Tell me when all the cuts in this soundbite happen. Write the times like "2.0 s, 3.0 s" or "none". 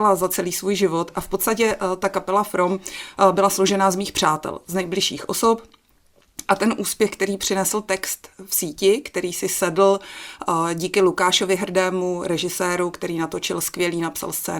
none